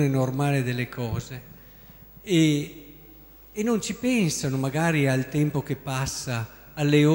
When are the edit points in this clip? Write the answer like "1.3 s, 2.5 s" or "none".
none